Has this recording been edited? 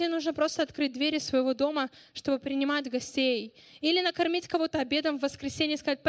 no; 0 cuts

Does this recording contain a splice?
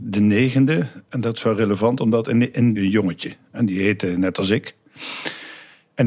yes; 1 cut; at 2.8 s

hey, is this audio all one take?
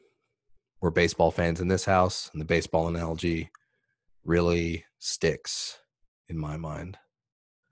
yes; 0 cuts

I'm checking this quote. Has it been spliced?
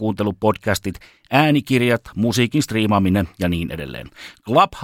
no; 0 cuts

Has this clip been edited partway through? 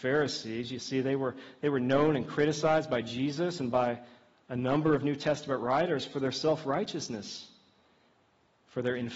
no; 0 cuts

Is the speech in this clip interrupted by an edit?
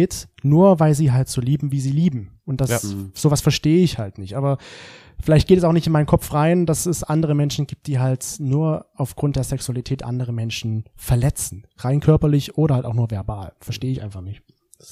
no; 0 cuts

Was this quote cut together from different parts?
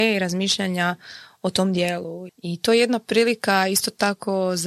yes; 1 cut; at 2.3 s

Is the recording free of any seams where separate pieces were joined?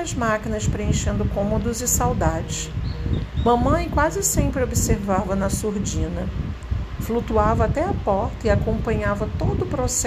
yes; 0 cuts

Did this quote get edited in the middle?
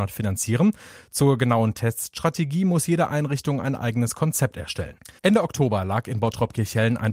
yes; 1 cut; at 5.2 s

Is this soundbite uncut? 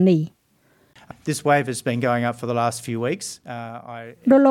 no; 1 cut; at 1.1 s

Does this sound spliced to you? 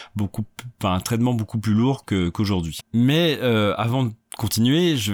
yes; 1 cut; at 2.8 s

